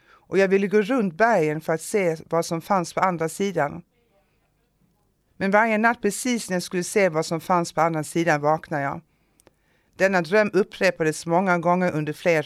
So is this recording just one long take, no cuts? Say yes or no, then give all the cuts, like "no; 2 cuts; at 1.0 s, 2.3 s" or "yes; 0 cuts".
yes; 0 cuts